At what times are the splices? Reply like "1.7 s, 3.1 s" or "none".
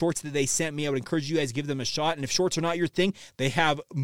none